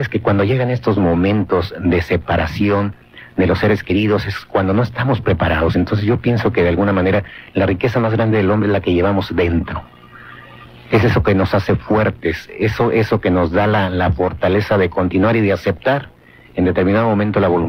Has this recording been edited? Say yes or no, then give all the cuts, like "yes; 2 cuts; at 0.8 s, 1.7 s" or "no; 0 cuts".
no; 0 cuts